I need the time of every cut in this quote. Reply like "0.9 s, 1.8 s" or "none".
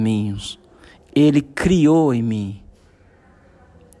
1.0 s